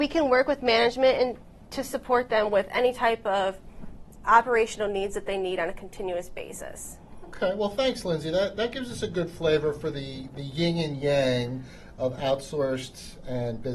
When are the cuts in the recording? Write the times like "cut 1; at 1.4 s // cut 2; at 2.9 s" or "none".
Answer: none